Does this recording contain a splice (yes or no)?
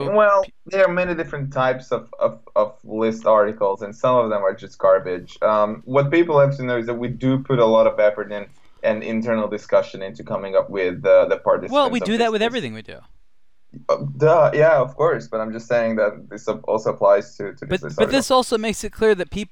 no